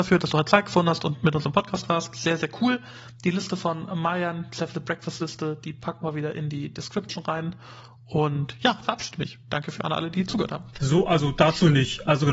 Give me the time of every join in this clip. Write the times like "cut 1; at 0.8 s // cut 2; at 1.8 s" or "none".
cut 1; at 8.8 s // cut 2; at 10.7 s